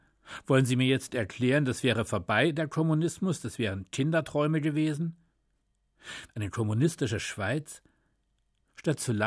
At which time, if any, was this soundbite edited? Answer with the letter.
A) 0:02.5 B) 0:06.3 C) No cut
B